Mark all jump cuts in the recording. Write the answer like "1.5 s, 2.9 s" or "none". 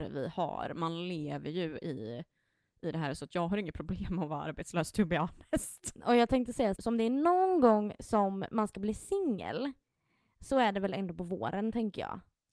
none